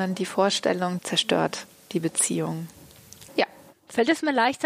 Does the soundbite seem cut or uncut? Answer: cut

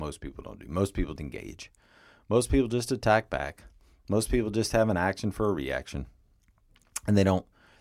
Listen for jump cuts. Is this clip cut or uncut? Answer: cut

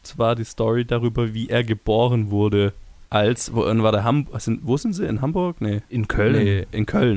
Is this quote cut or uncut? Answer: uncut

